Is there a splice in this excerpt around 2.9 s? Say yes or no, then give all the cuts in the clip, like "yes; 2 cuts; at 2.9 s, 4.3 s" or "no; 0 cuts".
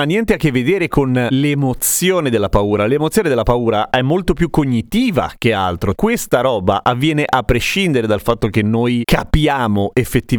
no; 1 cut; at 5.9 s